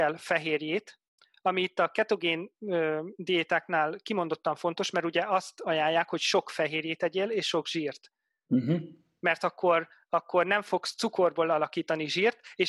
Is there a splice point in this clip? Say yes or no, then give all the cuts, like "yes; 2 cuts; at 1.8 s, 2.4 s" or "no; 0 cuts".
no; 0 cuts